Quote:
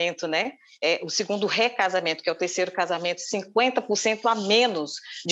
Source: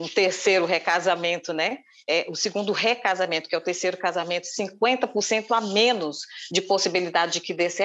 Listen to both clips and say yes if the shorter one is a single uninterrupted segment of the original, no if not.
yes